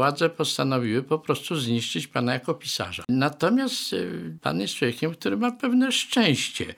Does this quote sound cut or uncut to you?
uncut